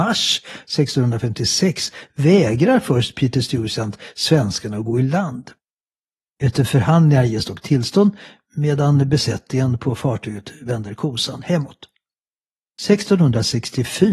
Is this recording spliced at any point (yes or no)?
yes